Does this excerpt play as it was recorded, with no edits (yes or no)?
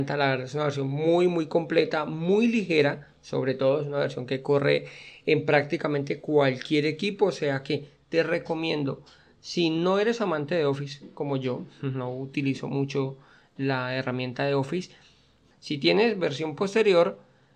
no